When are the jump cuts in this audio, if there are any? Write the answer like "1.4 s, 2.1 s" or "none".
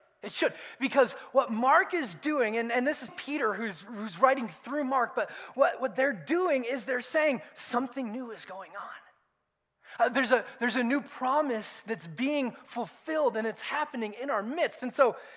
3.1 s